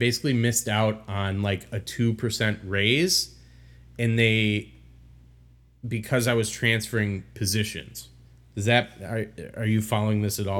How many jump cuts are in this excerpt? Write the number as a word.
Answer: zero